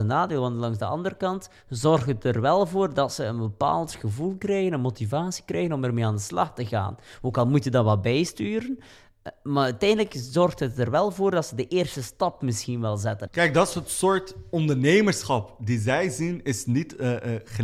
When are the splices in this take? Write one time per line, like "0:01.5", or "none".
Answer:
0:13.3